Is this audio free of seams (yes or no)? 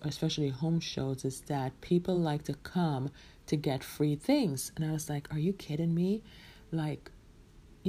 yes